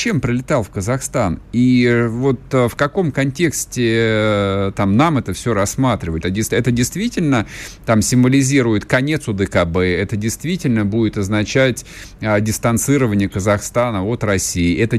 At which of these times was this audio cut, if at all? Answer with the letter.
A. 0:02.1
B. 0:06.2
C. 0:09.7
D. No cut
B